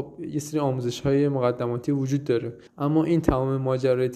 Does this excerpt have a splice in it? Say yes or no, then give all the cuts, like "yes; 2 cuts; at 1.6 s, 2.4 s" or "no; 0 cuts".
yes; 1 cut; at 2.7 s